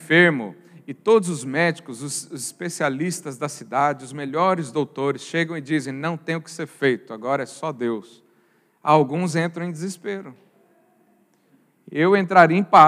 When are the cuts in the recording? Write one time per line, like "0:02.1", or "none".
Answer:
none